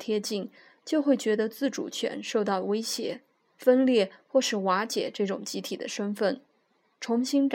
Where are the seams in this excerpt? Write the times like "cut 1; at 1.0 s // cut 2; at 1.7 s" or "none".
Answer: cut 1; at 3.5 s